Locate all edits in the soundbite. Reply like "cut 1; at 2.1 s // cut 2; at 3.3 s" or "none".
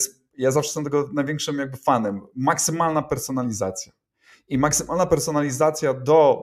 none

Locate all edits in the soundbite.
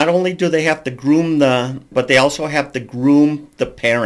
cut 1; at 1.9 s

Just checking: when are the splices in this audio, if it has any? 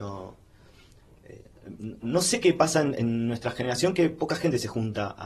none

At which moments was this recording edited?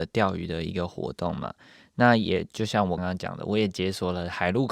cut 1; at 3.0 s

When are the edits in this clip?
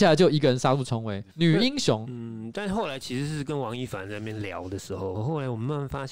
cut 1; at 1.3 s // cut 2; at 5.1 s

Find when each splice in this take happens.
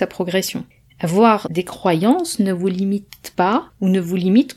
cut 1; at 1.4 s

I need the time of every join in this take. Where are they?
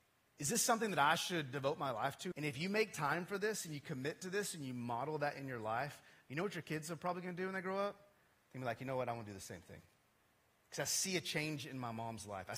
cut 1; at 2.3 s

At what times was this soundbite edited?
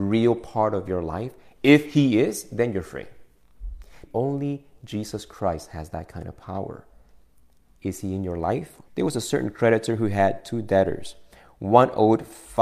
cut 1; at 4.1 s // cut 2; at 8.9 s

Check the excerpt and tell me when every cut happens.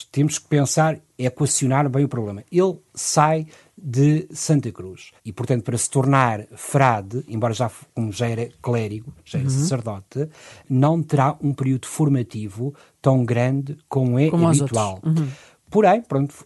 cut 1; at 5.2 s

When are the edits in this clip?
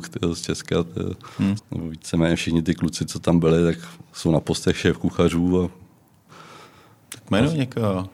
cut 1; at 1.6 s

